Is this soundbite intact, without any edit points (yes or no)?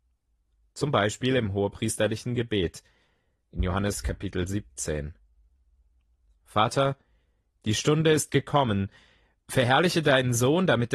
yes